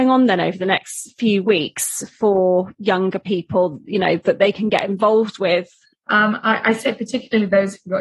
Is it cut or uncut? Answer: cut